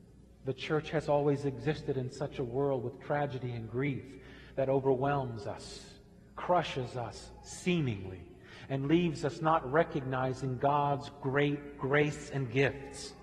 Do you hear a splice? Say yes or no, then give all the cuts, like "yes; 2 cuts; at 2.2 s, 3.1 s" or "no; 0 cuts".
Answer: no; 0 cuts